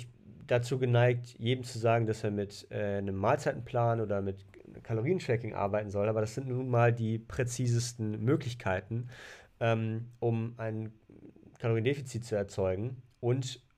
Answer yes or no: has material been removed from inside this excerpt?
no